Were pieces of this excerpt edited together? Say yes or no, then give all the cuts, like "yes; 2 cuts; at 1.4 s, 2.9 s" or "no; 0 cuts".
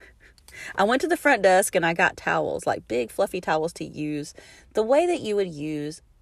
no; 0 cuts